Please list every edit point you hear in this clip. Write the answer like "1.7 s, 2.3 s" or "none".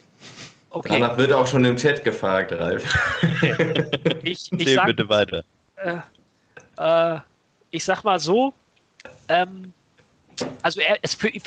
none